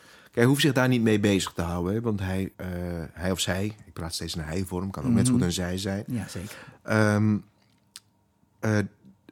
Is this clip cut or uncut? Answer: cut